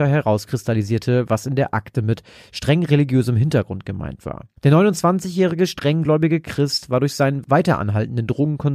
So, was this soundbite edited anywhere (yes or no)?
yes